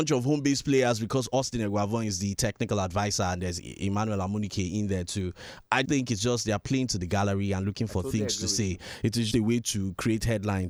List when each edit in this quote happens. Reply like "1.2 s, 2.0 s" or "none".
5.8 s, 9.3 s

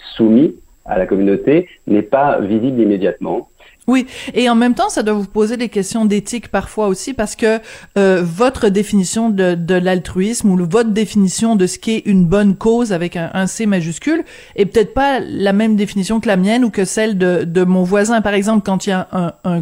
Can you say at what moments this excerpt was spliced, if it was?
3.8 s

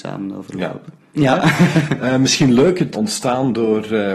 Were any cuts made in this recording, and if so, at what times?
1.1 s, 2.9 s

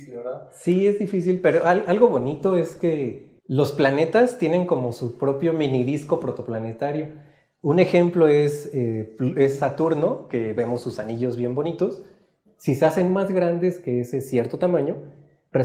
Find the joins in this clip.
3.4 s, 12.5 s

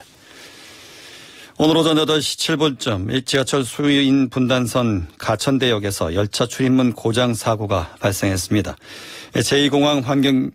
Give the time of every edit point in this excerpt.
9.3 s

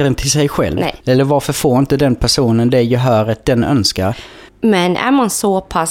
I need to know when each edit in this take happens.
1.0 s, 4.5 s

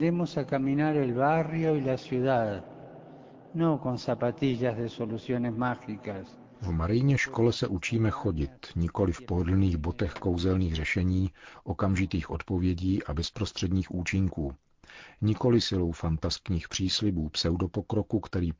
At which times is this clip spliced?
none

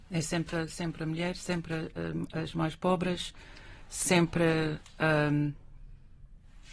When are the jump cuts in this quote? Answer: none

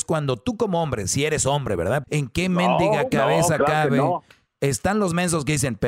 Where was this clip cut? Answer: 2.0 s

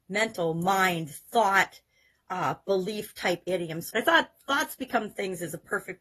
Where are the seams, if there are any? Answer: 3.9 s

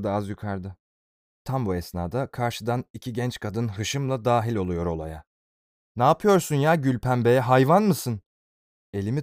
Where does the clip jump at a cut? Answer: 1.4 s

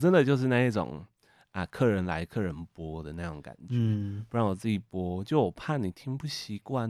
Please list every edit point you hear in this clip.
none

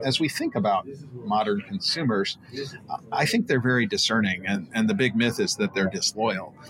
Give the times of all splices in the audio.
none

